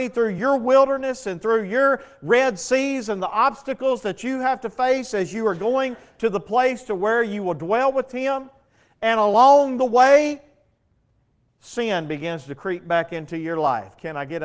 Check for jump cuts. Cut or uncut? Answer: uncut